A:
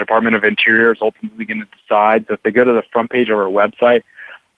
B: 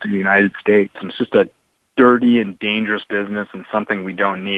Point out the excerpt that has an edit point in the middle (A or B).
B